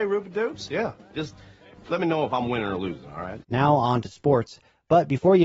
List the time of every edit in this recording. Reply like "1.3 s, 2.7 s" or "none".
3.4 s